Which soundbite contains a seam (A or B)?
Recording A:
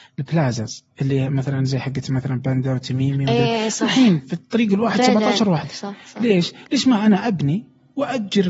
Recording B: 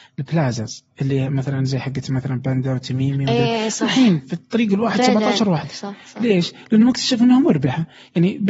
A